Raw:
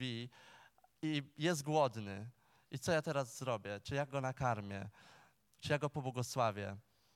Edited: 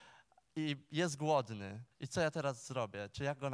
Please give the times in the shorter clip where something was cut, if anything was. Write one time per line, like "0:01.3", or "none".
0:01.9

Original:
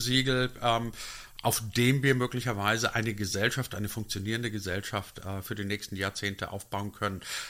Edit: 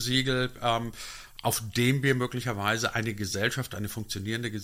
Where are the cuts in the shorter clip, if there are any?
none

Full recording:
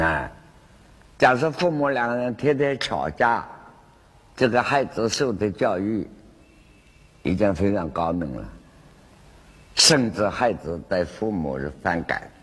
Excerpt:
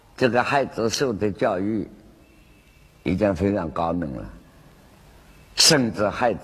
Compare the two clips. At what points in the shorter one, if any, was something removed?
none

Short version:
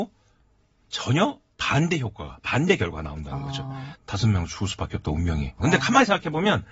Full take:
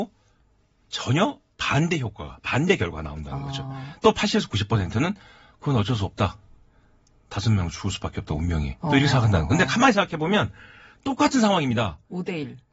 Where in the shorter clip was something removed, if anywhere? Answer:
0:04.0
0:05.6

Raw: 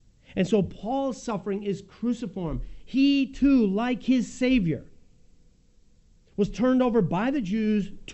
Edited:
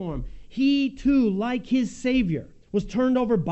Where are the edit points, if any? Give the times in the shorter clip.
0:02.6

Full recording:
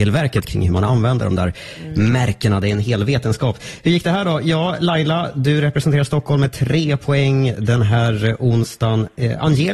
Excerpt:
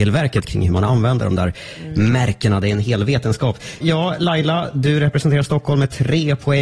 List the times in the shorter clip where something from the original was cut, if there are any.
0:03.8

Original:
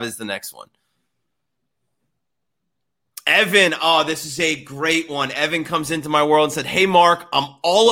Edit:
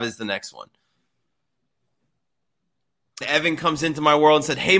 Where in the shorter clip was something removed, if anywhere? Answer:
0:03.2

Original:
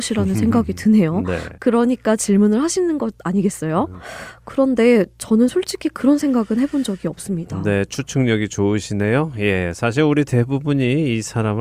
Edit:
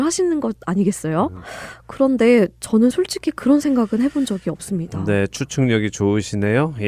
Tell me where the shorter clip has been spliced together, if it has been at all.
none

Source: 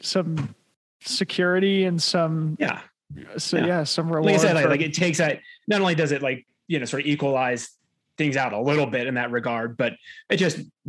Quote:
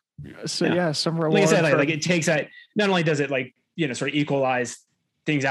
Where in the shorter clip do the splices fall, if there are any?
none

